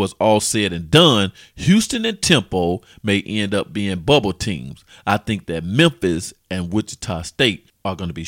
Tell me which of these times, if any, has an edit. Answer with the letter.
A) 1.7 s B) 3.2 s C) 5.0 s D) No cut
D